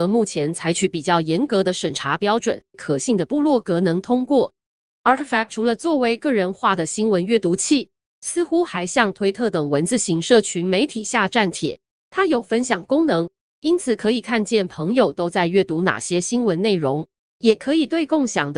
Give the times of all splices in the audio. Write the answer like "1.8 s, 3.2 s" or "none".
2.7 s